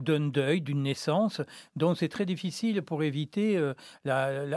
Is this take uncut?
yes; 0 cuts

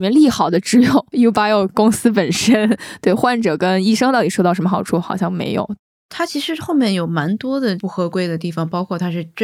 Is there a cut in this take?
no; 0 cuts

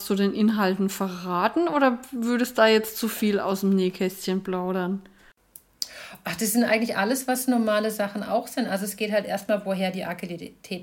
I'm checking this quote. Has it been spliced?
no; 0 cuts

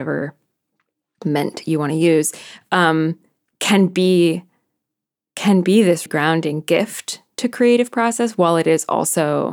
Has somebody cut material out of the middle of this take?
yes; 1 cut; at 6.1 s

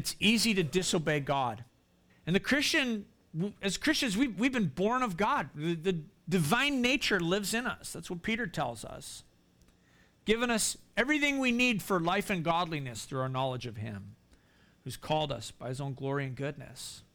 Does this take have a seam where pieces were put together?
yes; 1 cut; at 2.1 s

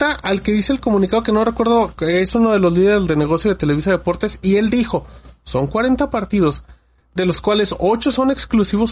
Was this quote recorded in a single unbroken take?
no; 1 cut; at 1.9 s

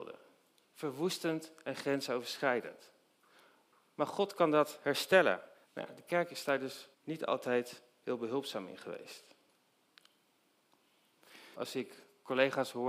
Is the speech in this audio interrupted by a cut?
yes; 3 cuts; at 5.6 s, 6.9 s, 11.5 s

